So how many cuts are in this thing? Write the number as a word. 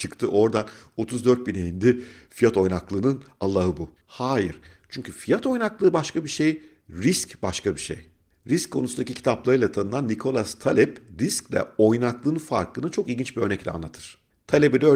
one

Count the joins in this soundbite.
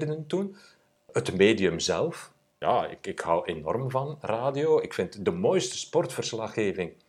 one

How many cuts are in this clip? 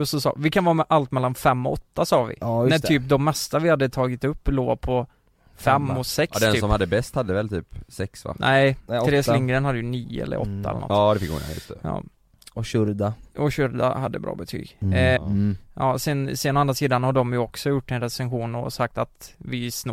one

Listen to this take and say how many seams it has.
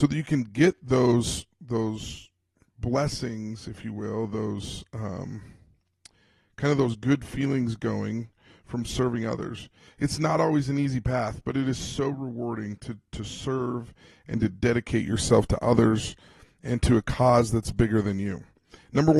zero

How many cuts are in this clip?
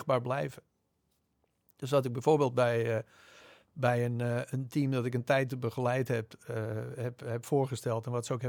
zero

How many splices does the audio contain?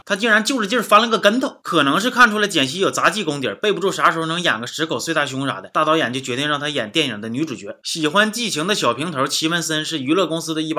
zero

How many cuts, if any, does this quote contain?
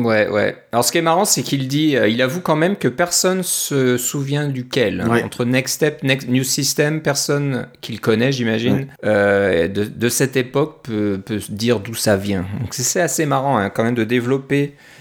one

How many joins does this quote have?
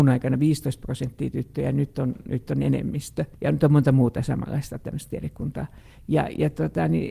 one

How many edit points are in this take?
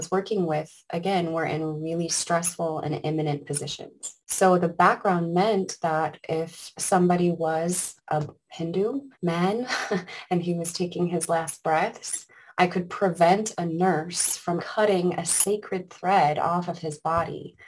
three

